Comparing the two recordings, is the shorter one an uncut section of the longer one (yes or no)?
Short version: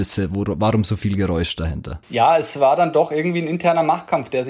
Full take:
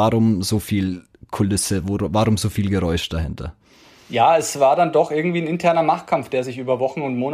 no